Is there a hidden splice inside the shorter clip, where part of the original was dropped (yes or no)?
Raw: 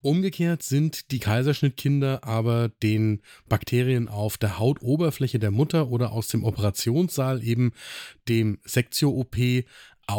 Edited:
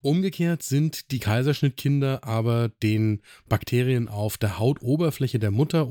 no